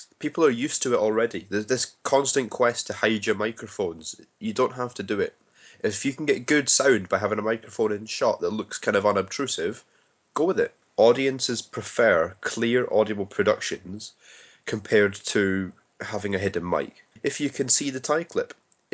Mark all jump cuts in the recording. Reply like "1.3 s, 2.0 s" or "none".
10.8 s, 17.2 s